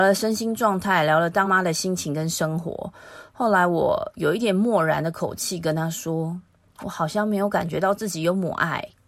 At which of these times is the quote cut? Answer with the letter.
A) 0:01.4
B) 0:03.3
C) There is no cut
A